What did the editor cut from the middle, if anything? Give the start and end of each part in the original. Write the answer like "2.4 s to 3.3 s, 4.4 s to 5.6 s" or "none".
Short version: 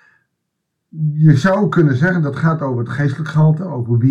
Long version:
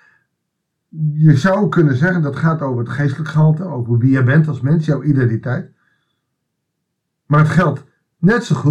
none